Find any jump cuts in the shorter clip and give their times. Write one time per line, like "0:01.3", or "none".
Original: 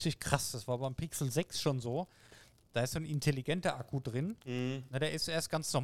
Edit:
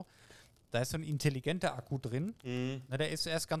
none